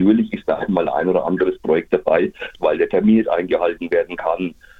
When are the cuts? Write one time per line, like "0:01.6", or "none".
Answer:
0:02.6